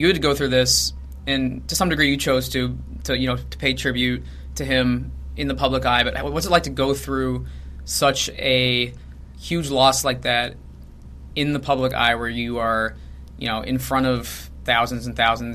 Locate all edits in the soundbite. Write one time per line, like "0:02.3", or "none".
none